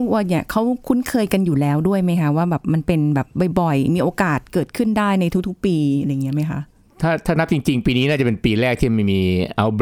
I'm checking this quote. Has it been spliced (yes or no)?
no